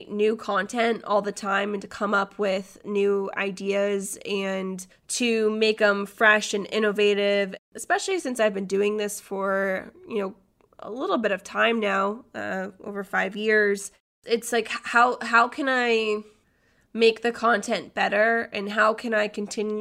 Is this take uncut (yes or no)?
yes